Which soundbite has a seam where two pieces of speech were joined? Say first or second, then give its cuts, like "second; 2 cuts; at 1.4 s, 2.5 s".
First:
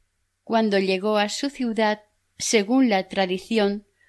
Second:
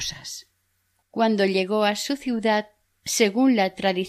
second; 1 cut; at 1.0 s